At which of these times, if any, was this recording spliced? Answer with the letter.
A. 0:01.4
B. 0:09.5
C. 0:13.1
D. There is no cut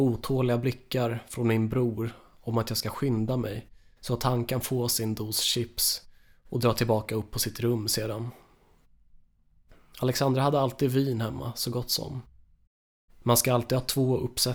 C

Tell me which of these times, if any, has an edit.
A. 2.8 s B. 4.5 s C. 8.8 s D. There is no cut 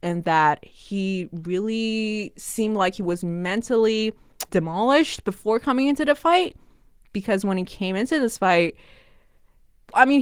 B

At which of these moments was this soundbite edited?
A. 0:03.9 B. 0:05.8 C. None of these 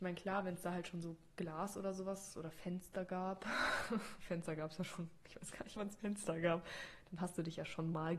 B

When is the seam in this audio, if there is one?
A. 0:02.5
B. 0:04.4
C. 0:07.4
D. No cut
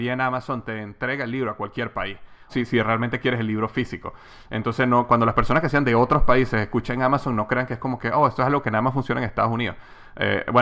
A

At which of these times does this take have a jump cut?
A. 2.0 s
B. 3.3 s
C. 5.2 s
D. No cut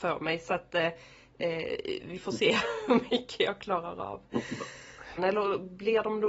C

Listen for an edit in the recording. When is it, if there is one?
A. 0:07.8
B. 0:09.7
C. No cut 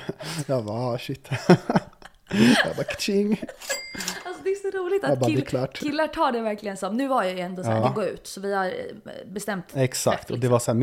A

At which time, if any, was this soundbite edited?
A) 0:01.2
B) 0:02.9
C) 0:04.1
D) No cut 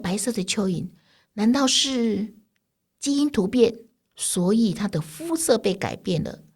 C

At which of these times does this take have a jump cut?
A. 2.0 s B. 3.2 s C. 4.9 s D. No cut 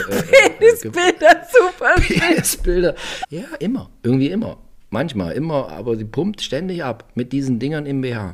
B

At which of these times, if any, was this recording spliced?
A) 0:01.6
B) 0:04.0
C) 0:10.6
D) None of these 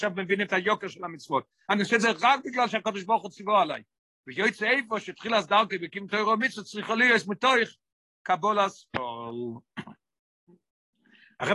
D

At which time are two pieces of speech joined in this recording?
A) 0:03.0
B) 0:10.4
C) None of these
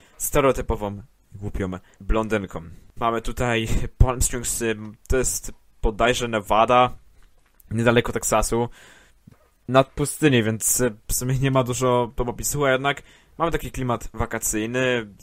A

